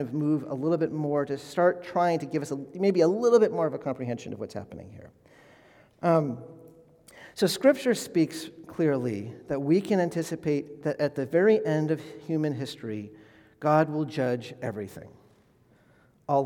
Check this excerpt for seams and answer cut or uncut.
uncut